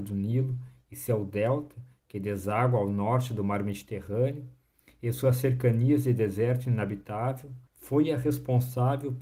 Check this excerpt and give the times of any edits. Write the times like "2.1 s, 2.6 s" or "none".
7.7 s